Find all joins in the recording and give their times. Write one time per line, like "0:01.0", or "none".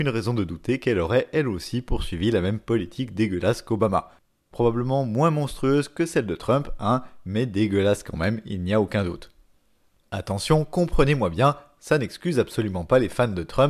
none